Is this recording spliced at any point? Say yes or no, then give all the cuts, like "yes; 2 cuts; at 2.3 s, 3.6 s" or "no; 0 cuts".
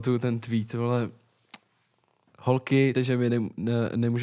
yes; 1 cut; at 2.9 s